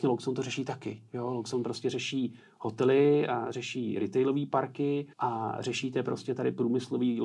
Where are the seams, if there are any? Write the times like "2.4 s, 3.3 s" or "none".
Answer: 5.1 s